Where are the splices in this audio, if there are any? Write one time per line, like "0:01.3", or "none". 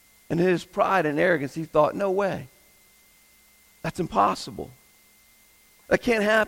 none